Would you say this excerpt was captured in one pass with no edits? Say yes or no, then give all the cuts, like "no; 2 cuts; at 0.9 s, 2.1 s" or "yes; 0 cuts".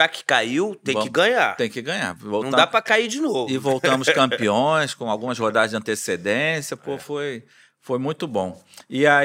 yes; 0 cuts